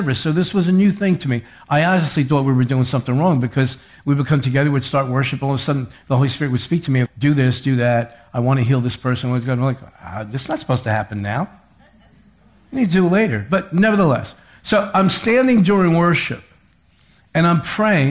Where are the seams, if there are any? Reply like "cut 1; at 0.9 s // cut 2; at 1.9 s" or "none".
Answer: cut 1; at 7.1 s